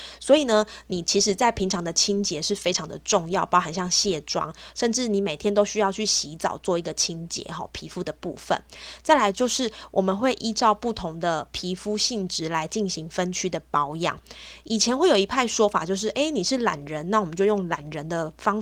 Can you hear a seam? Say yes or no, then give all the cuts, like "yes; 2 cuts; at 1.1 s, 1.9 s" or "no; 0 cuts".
no; 0 cuts